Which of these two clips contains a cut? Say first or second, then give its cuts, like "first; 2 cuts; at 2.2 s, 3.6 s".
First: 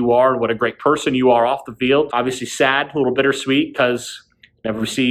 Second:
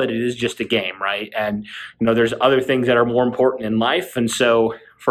first; 1 cut; at 2.1 s